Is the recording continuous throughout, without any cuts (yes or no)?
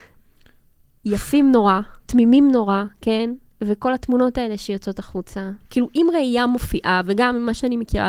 no